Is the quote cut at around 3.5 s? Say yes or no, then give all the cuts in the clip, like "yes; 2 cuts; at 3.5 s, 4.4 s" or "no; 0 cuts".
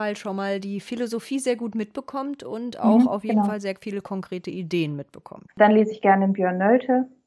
no; 1 cut; at 5.5 s